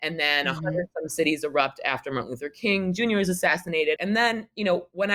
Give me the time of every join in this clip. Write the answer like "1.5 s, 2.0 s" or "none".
4.0 s